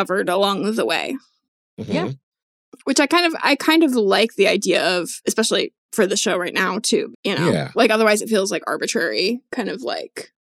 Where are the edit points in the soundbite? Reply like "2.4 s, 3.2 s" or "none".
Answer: 7.1 s